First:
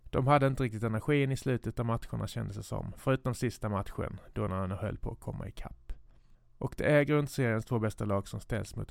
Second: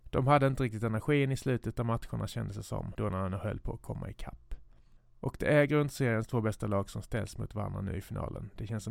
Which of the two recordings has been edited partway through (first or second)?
second